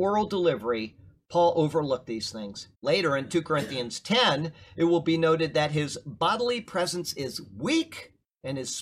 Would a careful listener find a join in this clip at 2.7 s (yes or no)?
yes